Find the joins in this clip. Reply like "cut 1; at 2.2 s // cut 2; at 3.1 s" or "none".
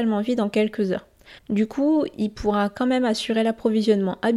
cut 1; at 1.4 s